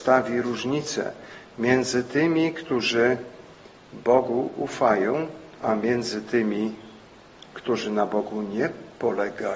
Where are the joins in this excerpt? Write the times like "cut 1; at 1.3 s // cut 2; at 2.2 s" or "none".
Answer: cut 1; at 5.6 s